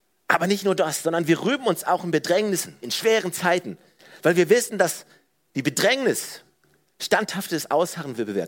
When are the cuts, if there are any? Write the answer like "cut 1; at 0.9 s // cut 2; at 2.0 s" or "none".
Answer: cut 1; at 2.8 s